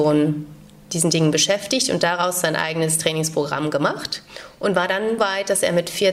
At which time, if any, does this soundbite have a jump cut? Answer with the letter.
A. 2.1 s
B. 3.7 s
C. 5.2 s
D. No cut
C